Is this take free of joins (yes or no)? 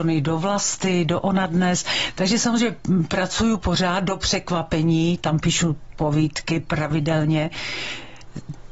yes